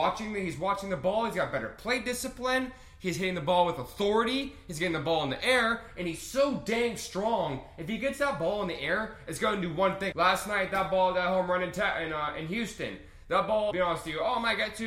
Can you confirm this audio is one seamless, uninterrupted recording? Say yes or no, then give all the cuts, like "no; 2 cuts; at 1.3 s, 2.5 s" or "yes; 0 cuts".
no; 2 cuts; at 10.1 s, 13.7 s